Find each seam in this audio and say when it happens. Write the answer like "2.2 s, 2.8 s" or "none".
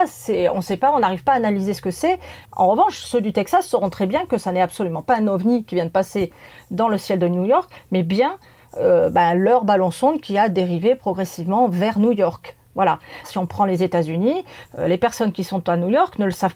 2.4 s, 13.2 s, 14.6 s